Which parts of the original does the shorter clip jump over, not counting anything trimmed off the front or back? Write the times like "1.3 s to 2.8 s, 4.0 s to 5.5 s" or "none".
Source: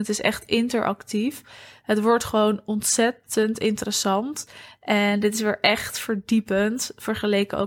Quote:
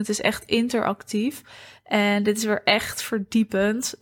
1.8 s to 4.7 s